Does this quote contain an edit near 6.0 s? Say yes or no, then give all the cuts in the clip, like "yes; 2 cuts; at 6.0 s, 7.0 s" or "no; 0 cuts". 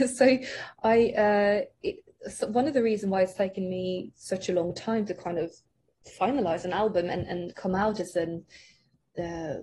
no; 0 cuts